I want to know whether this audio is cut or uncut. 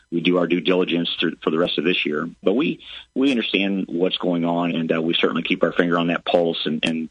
cut